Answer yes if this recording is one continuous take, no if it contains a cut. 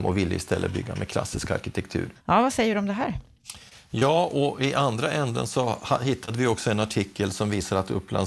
no